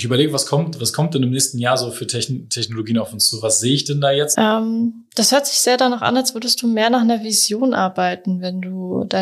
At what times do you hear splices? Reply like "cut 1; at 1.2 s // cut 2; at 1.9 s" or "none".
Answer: cut 1; at 4.3 s